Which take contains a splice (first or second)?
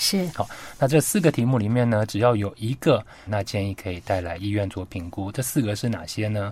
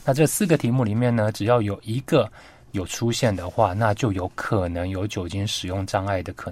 first